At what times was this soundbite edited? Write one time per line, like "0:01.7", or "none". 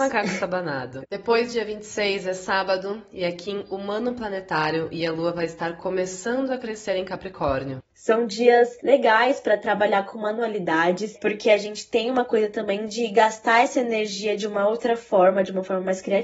0:01.0
0:07.8